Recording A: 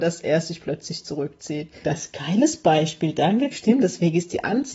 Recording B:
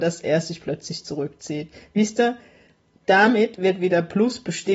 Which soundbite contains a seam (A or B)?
A